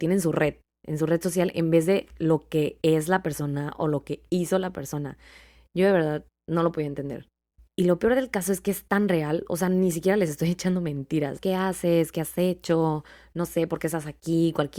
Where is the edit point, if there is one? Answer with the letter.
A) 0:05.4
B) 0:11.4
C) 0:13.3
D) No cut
B